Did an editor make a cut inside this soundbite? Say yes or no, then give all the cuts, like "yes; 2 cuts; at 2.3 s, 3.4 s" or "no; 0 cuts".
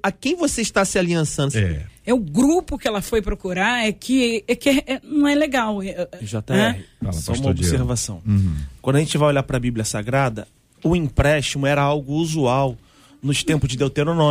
yes; 2 cuts; at 1.5 s, 6.2 s